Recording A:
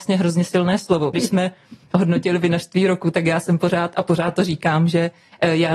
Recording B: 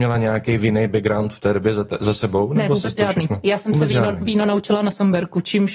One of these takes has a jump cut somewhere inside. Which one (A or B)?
A